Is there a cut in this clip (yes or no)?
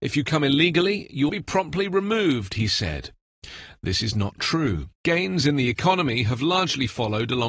yes